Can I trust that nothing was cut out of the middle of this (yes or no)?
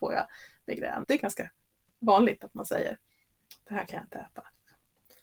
no